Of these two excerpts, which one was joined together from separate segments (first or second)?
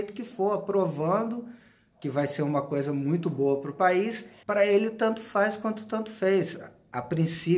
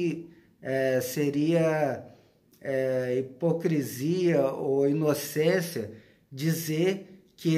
first